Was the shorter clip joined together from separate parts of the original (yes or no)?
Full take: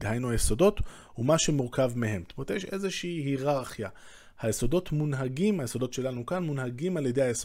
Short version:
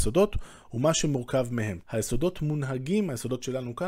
yes